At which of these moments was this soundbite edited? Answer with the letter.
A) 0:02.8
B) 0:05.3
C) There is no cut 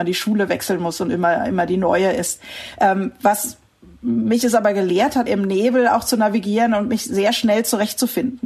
B